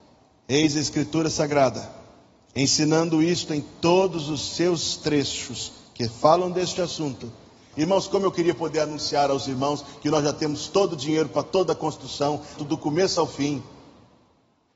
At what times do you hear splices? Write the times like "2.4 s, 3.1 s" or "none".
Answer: 7.7 s, 12.6 s